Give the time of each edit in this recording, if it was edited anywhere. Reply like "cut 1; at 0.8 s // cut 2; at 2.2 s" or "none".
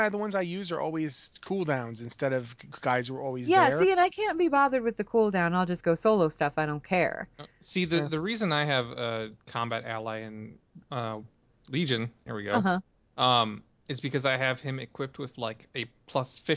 none